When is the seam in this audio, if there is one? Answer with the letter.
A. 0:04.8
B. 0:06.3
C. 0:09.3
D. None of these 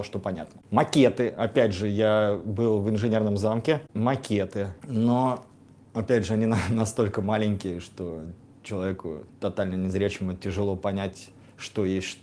C